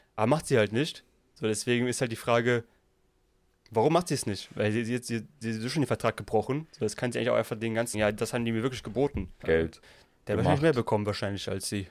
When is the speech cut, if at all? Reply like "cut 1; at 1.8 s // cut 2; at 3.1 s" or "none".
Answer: cut 1; at 7.9 s // cut 2; at 9.4 s